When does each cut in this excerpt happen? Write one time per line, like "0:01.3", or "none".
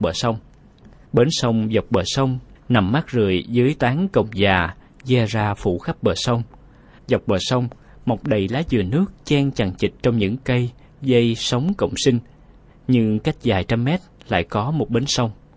0:01.0
0:07.0